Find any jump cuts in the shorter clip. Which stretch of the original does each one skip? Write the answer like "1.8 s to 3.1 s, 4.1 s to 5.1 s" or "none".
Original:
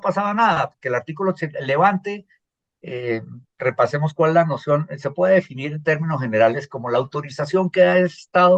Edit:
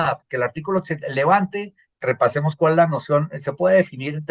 2.5 s to 3.5 s